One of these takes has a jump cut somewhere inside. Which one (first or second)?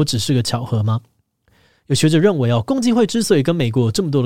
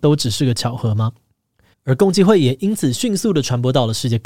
second